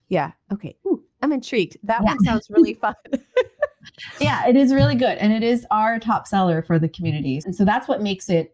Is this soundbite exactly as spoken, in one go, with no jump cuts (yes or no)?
no